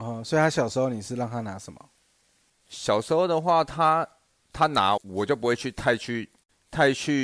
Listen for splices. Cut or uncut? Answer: cut